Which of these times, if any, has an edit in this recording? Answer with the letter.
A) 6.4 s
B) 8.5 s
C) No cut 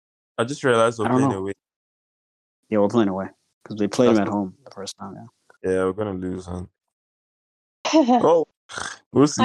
B